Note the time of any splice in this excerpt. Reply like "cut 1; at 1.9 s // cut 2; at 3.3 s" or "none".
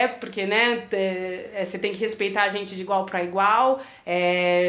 none